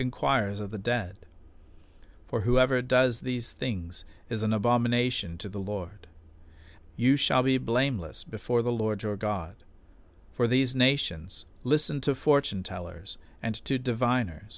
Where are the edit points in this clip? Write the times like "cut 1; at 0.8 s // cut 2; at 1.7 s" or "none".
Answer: cut 1; at 6.8 s // cut 2; at 11.5 s